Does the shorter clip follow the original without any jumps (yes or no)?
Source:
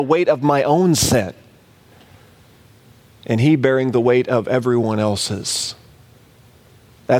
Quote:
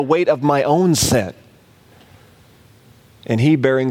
yes